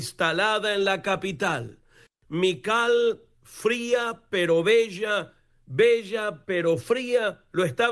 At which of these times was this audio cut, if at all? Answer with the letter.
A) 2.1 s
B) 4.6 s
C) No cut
A